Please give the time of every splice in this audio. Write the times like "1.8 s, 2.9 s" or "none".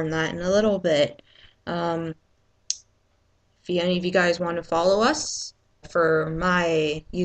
5.8 s